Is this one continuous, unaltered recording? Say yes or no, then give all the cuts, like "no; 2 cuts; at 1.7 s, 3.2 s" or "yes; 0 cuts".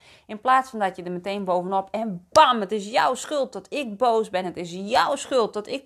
yes; 0 cuts